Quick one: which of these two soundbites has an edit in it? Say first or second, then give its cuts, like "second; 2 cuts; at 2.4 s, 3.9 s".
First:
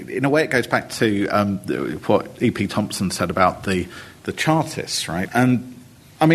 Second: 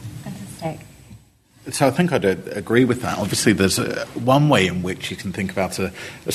first; 1 cut; at 5.3 s